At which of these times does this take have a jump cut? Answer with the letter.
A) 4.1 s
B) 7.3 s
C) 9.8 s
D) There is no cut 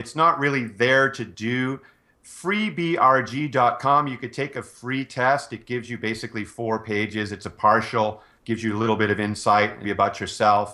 C